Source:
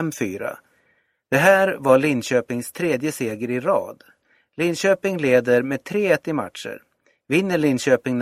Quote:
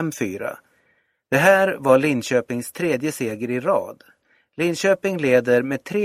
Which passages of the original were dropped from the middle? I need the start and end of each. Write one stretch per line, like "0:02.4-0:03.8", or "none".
none